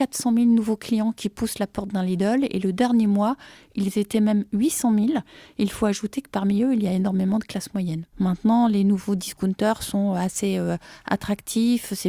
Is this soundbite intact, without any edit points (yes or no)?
no